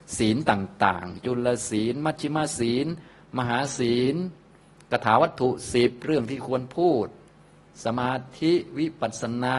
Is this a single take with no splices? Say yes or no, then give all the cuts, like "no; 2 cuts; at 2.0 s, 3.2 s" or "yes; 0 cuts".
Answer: yes; 0 cuts